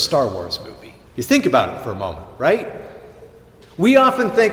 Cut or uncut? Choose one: cut